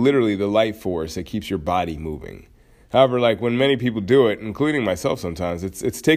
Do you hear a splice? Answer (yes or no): no